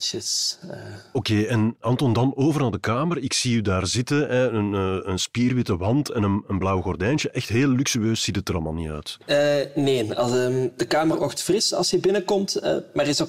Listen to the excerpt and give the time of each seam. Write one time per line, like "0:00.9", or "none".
none